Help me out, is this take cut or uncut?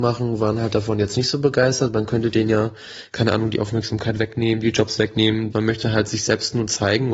cut